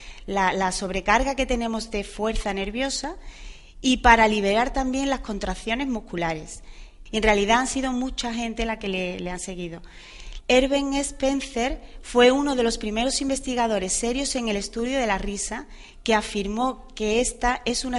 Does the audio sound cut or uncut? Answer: cut